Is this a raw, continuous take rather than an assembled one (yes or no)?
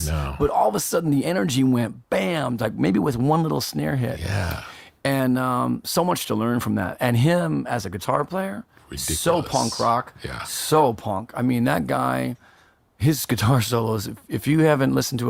yes